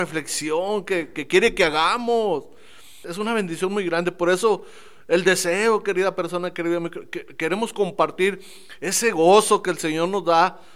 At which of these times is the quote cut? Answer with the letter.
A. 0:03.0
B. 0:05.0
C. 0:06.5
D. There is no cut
A